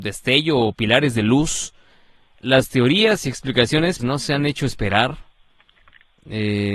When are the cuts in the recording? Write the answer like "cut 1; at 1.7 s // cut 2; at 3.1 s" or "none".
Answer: cut 1; at 4.0 s